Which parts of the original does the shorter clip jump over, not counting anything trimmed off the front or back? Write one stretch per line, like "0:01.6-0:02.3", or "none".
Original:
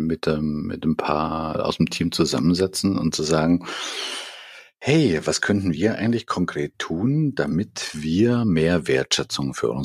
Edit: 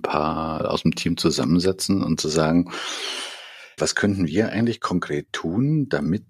0:04.7-0:05.2